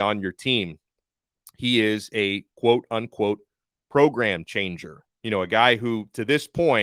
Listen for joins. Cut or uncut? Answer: cut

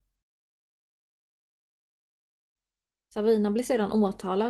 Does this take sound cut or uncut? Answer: uncut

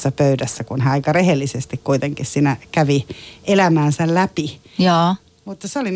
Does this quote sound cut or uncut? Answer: uncut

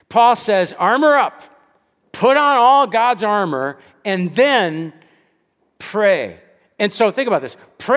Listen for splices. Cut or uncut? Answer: uncut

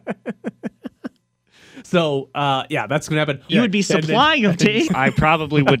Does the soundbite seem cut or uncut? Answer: cut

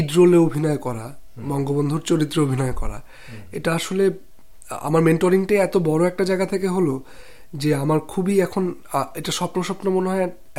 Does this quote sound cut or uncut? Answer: uncut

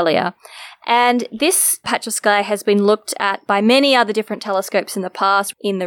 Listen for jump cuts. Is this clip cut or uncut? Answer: uncut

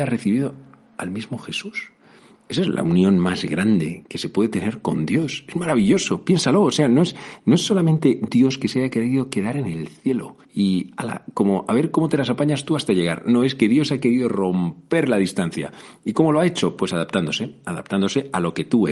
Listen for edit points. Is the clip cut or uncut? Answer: cut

